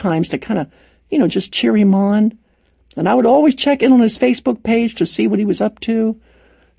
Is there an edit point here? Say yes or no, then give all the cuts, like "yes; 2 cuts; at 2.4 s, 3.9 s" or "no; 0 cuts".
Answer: no; 0 cuts